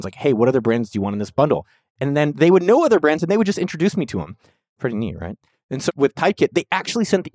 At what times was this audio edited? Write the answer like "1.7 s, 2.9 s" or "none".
5.9 s